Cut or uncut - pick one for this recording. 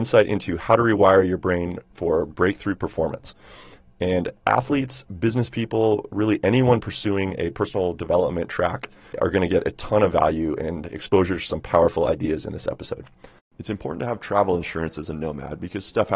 cut